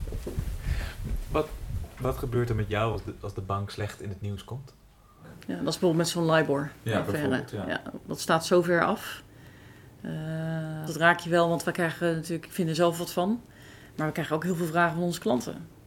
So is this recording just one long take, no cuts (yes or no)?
no